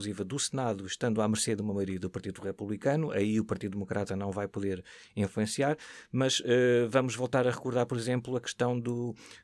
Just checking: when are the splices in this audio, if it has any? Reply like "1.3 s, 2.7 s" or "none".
none